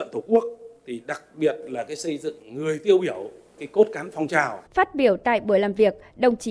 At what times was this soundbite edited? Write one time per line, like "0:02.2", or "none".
0:04.7